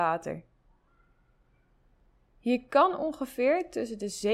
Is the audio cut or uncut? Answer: uncut